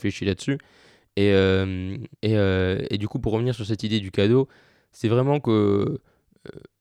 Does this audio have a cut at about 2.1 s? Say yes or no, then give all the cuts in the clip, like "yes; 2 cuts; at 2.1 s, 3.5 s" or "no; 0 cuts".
yes; 1 cut; at 2.1 s